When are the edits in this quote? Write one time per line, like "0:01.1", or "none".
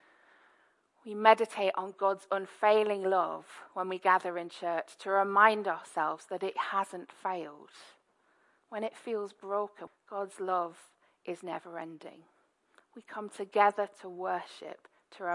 0:09.9
0:12.8

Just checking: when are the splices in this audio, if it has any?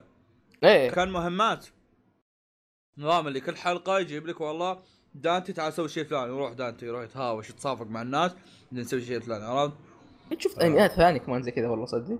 0:00.9

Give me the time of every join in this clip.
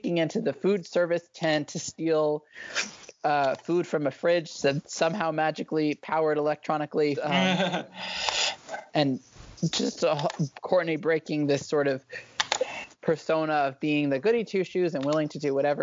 0:07.1

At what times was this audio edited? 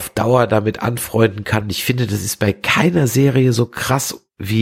none

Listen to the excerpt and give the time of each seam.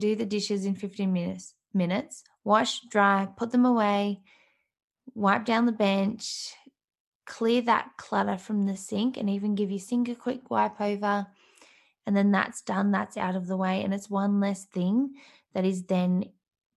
none

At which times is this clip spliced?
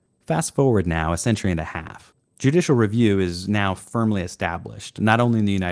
0:02.2

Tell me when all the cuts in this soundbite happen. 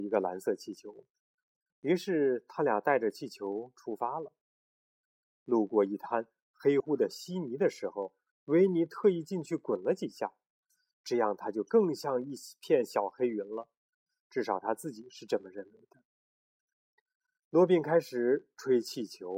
0:06.8

